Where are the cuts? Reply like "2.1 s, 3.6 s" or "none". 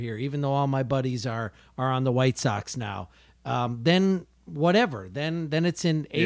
none